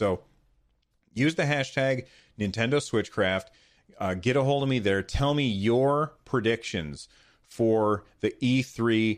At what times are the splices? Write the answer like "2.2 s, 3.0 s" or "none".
none